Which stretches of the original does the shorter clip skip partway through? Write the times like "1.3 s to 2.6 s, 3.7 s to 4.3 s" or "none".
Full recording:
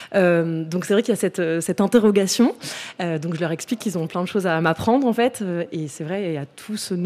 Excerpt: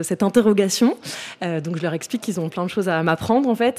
none